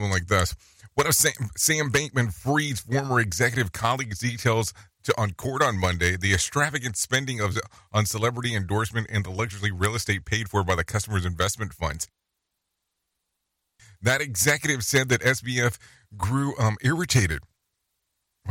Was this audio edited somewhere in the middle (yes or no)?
no